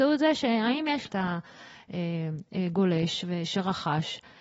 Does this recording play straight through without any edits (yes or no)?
no